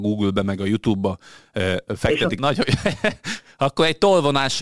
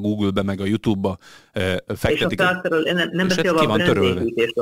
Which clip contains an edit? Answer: first; 1 cut; at 2.4 s

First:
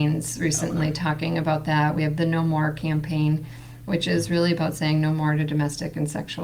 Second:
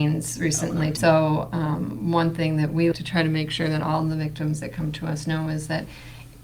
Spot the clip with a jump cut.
second; 2 cuts; at 1.0 s, 2.9 s

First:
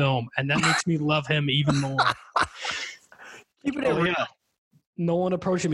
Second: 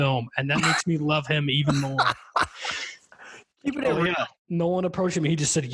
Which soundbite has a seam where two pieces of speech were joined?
second; 1 cut; at 4.4 s

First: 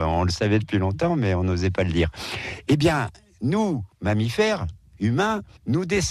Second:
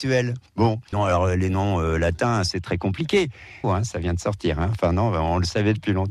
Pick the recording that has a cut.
second; 2 cuts; at 0.9 s, 3.6 s

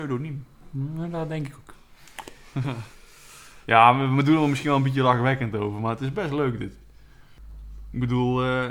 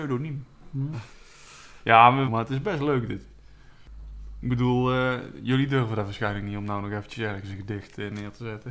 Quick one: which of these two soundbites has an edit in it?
second; 2 cuts; at 0.9 s, 2.3 s

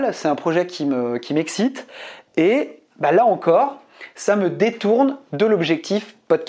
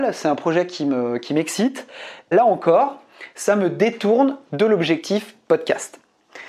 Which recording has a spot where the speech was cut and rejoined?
second; 1 cut; at 2.3 s

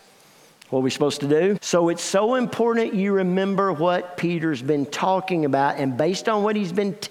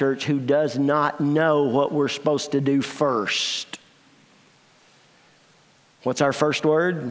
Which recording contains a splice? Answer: first; 1 cut; at 1.6 s

